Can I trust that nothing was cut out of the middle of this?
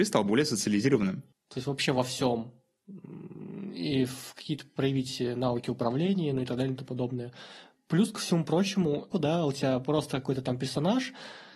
no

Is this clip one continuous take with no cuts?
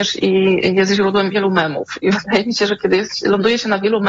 yes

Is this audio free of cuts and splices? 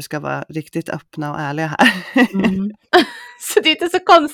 no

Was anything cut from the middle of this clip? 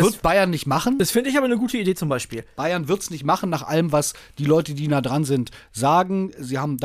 no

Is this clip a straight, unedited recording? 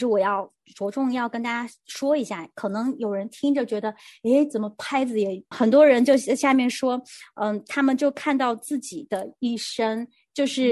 no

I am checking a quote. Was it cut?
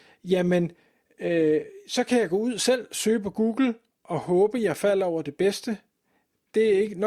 no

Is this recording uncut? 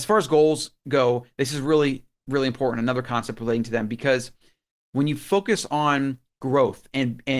yes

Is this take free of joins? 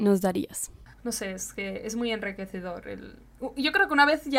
no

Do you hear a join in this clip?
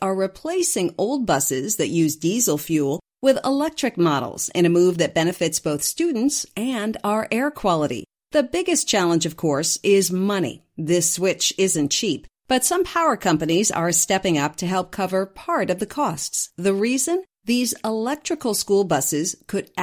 no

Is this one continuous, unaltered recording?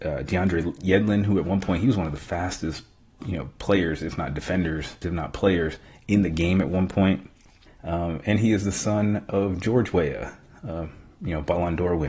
no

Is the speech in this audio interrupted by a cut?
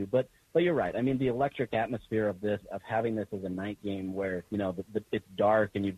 yes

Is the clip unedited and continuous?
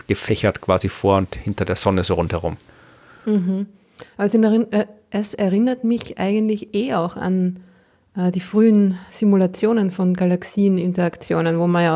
yes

